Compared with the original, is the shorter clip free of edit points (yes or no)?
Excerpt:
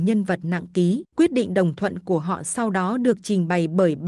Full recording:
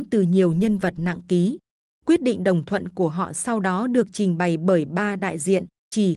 no